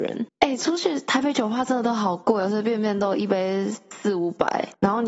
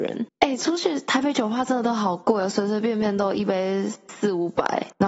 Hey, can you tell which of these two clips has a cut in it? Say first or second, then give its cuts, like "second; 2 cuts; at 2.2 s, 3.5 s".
first; 1 cut; at 2.5 s